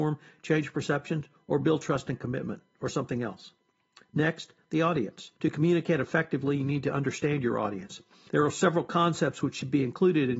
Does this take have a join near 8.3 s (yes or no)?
yes